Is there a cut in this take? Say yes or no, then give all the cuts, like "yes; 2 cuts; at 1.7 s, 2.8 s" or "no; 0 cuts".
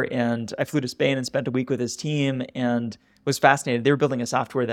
no; 0 cuts